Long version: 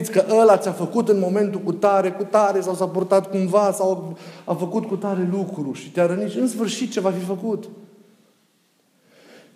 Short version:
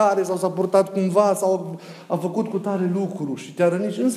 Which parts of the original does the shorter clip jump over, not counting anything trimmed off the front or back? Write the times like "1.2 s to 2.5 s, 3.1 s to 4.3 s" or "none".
none